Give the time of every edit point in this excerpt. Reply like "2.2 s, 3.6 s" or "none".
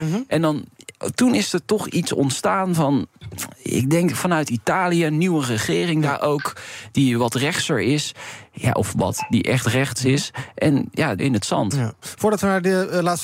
11.2 s